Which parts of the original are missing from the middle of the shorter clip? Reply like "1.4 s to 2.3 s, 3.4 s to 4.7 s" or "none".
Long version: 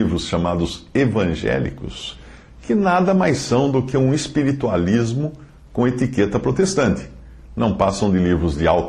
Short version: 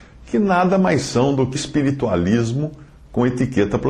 3.9 s to 4.2 s